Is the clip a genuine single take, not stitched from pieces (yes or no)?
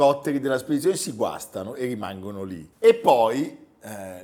no